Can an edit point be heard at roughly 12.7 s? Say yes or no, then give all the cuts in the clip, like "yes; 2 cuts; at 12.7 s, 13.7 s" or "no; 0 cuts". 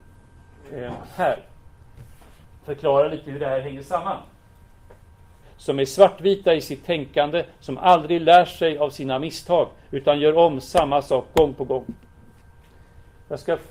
no; 1 cut; at 5.4 s